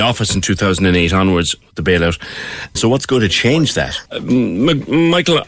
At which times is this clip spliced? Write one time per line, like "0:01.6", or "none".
0:02.8
0:04.1